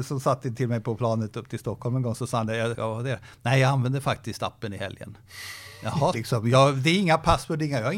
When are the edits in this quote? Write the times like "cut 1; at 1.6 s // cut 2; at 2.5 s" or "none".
cut 1; at 2.7 s // cut 2; at 6.1 s